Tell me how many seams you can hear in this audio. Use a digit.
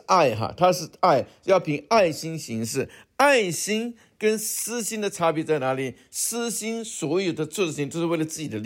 0